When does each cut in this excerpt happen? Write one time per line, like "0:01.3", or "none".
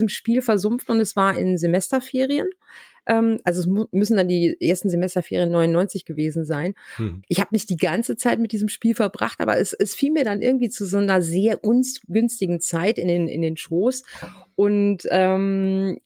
0:07.2